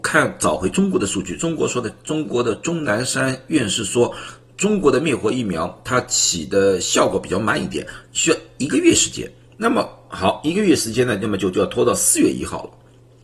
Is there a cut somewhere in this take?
no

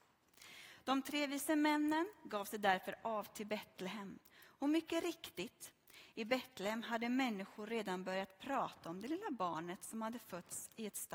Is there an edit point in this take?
no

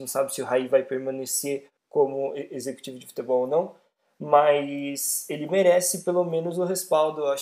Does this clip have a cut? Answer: no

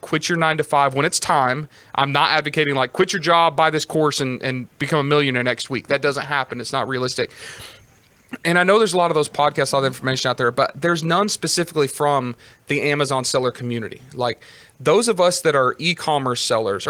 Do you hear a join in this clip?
no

